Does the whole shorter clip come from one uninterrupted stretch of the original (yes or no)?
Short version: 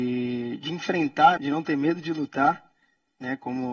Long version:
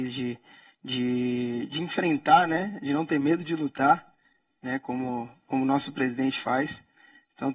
no